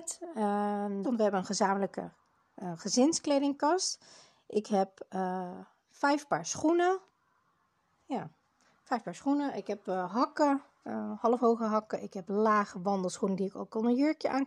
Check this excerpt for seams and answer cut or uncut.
cut